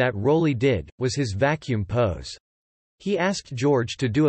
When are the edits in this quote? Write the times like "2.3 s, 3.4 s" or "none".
0.9 s, 2.8 s